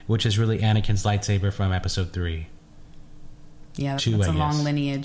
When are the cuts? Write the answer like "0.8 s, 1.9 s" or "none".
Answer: 4.0 s